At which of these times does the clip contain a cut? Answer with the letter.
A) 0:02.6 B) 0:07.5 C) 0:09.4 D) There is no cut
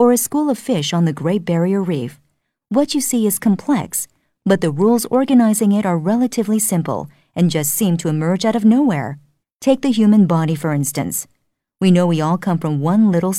C